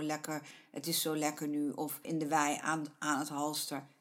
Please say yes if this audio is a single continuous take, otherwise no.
no